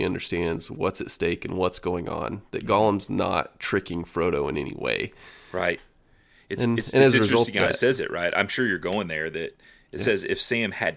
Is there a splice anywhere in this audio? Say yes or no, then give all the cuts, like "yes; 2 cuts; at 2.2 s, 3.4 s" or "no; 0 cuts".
no; 0 cuts